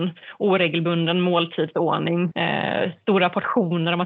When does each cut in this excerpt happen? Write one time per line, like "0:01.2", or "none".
0:02.3